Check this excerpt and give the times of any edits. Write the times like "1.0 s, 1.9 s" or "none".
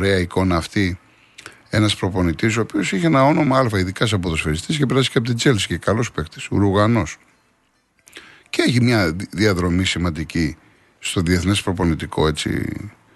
none